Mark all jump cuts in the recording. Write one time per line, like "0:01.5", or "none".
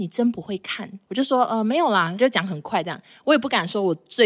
0:01.0
0:02.2